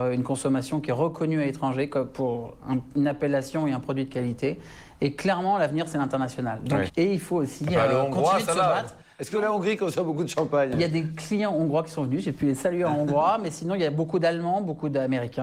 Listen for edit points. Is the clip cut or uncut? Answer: cut